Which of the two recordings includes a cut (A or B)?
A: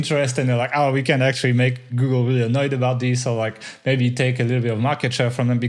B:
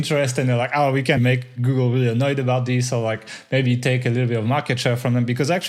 B